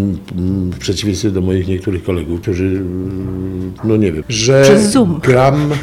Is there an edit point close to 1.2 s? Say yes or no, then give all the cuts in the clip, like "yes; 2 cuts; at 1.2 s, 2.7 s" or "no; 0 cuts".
no; 2 cuts; at 2.4 s, 4.2 s